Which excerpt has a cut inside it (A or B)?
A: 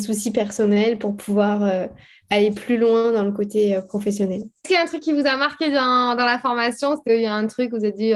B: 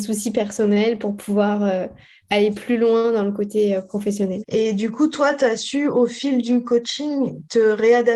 B